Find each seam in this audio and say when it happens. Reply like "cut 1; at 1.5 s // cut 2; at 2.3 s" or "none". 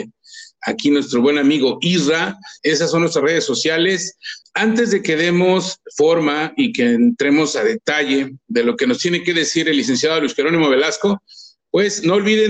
cut 1; at 2.6 s // cut 2; at 4.4 s